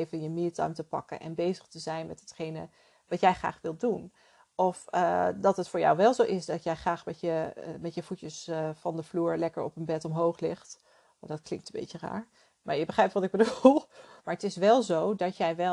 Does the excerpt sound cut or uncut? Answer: cut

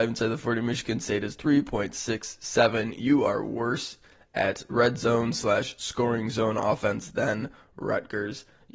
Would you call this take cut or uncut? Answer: uncut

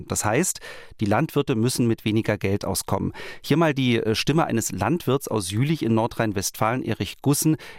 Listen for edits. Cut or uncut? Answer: uncut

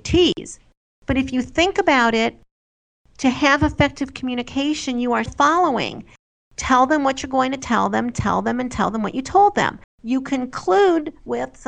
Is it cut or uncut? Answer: cut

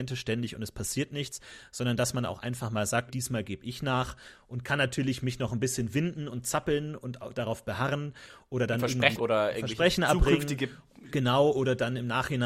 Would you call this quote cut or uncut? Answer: cut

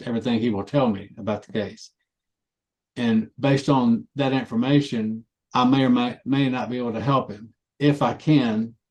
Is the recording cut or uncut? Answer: cut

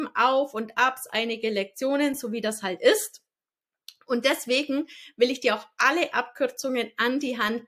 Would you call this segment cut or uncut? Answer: uncut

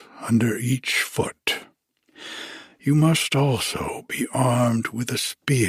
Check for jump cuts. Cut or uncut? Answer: uncut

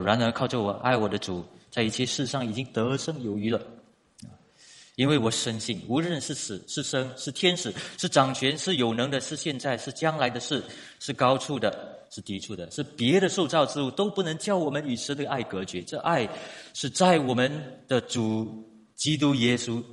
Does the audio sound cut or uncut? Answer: uncut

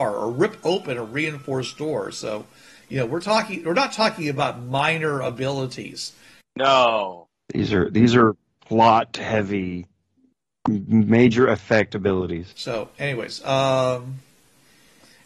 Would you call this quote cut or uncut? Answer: cut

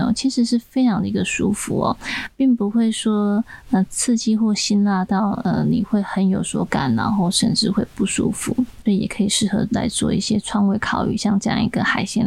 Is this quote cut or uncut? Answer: cut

